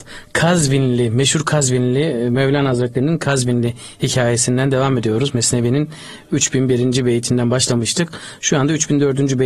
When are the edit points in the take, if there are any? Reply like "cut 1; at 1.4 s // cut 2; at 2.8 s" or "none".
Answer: none